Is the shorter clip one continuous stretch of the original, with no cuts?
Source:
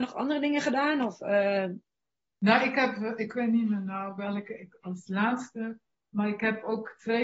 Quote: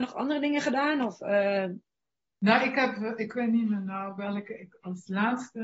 yes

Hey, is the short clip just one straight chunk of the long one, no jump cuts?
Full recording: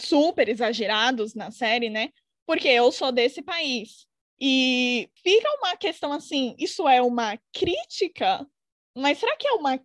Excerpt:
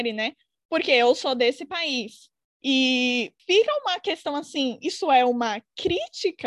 yes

